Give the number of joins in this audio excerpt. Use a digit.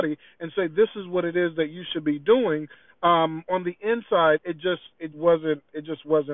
1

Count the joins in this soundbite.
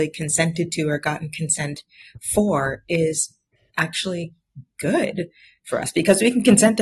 0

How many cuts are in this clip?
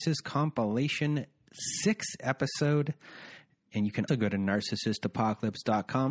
1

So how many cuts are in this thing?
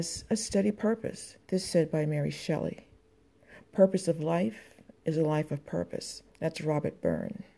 2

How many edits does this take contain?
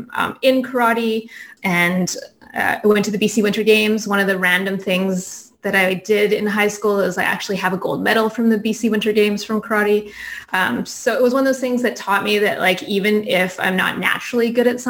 1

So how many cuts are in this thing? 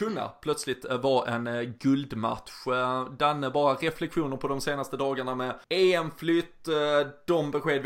1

